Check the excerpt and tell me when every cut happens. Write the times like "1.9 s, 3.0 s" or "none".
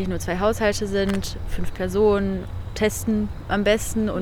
none